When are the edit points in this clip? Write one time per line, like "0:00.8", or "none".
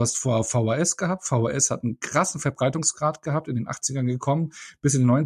none